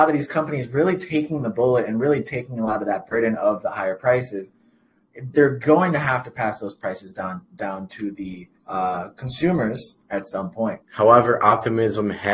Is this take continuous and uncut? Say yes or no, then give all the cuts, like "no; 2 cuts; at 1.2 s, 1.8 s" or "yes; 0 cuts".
no; 2 cuts; at 8.6 s, 10.8 s